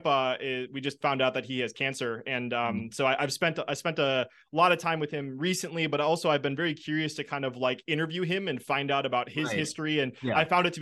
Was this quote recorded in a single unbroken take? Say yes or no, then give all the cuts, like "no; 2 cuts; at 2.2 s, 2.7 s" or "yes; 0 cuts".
yes; 0 cuts